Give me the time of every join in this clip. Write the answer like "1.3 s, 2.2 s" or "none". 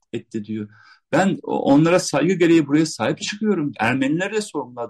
3.7 s